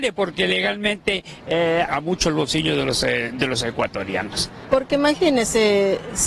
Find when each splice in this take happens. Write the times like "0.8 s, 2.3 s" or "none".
1.9 s, 4.7 s